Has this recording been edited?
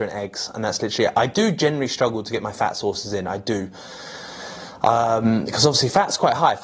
no; 0 cuts

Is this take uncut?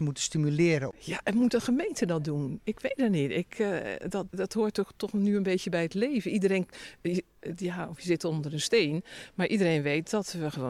no; 1 cut; at 4.3 s

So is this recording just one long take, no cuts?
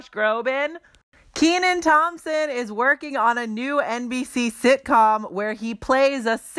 yes; 0 cuts

